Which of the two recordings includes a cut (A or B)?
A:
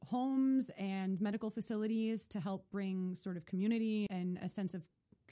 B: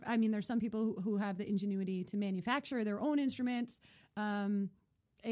A